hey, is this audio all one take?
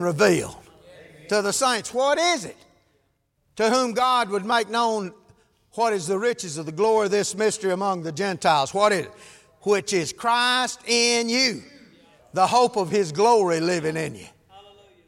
no; 1 cut; at 12.2 s

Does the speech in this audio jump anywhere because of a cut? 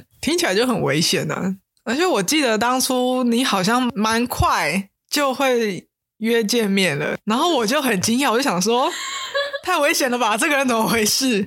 no; 0 cuts

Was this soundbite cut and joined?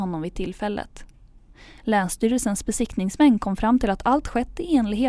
no; 0 cuts

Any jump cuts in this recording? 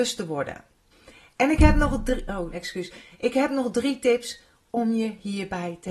yes; 1 cut; at 2.5 s

